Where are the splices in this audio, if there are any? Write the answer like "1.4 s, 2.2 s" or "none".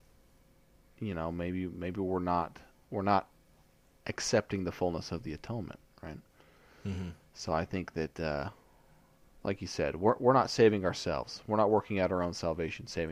none